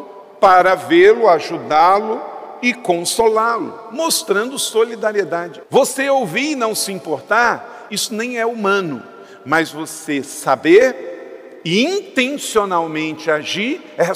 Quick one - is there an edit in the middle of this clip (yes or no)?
yes